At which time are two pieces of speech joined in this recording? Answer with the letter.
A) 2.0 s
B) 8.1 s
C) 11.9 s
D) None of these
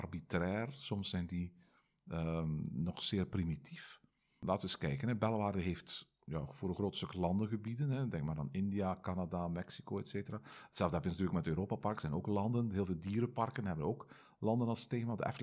D